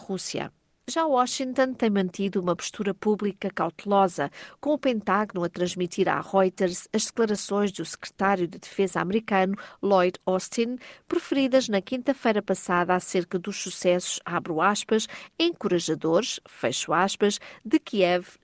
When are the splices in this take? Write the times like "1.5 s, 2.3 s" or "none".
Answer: none